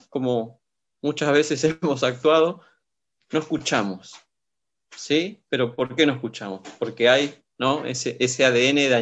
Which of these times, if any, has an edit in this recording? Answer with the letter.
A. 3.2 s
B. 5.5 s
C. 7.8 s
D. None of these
D